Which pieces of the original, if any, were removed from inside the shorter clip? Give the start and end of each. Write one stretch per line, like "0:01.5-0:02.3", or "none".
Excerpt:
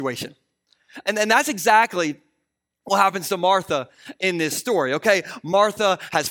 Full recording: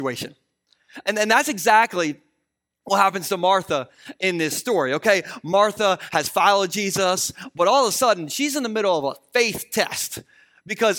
none